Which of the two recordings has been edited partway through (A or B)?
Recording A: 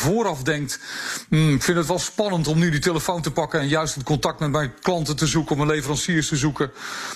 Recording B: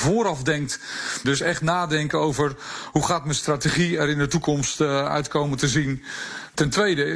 B